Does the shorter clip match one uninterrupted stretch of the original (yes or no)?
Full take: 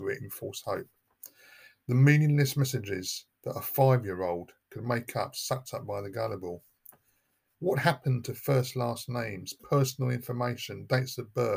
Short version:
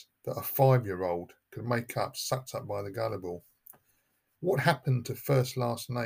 yes